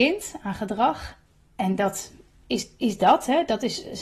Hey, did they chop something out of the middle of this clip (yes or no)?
no